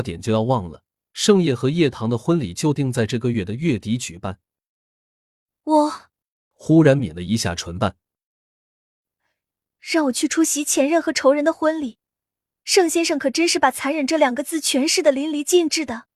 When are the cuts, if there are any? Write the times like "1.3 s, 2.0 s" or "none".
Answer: 6.5 s